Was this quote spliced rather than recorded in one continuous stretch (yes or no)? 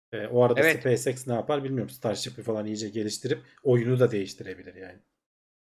no